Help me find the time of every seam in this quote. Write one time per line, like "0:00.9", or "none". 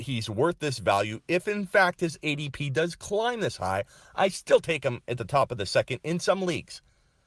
none